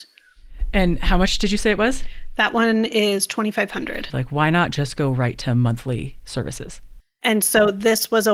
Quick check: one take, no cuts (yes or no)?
no